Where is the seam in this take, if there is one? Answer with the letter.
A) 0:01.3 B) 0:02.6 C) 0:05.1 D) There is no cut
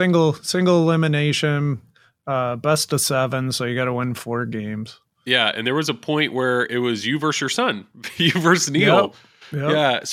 D